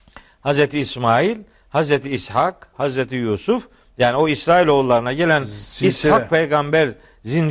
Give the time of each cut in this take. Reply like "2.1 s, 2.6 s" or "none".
2.7 s